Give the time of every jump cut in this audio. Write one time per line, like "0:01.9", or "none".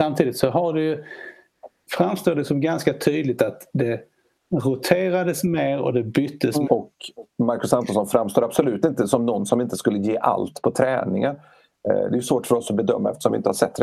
0:06.7